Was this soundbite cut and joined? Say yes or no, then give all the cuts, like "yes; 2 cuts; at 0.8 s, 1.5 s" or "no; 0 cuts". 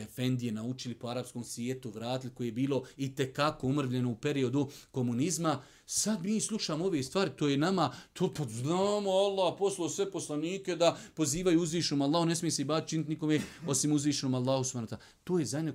no; 0 cuts